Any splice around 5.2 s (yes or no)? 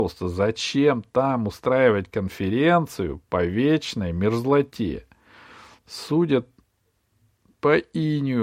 no